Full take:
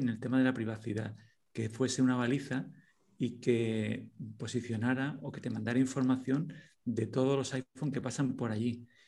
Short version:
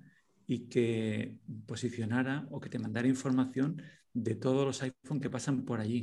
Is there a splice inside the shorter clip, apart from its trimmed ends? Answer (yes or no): no